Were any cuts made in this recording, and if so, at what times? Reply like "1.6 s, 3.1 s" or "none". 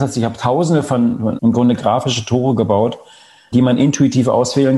1.4 s, 3.5 s